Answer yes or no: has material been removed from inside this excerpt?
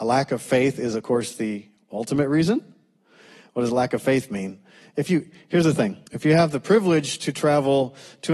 yes